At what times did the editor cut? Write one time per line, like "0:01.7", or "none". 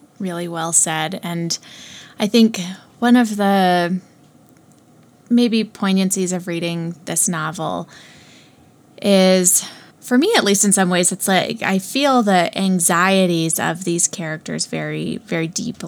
0:09.9